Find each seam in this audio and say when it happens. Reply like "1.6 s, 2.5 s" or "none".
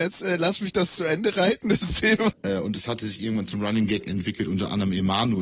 2.3 s

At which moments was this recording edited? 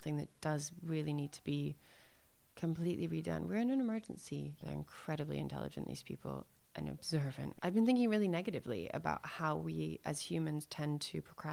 4.6 s, 7.6 s

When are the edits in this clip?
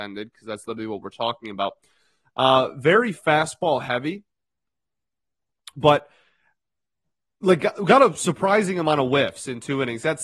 none

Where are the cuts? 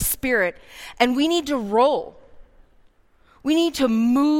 none

